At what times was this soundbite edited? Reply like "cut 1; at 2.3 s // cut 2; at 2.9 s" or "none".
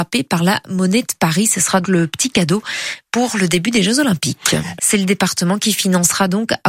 cut 1; at 1.8 s // cut 2; at 4.8 s